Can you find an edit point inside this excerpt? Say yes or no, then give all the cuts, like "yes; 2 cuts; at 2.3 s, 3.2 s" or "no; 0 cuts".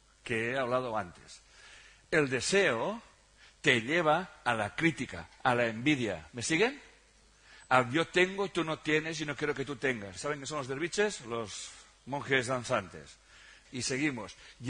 yes; 2 cuts; at 10.2 s, 13.7 s